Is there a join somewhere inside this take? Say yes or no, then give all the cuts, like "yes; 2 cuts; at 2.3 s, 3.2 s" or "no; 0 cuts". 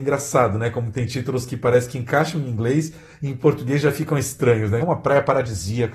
yes; 1 cut; at 4.8 s